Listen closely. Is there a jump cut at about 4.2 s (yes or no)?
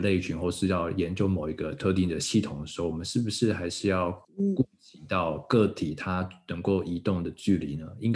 yes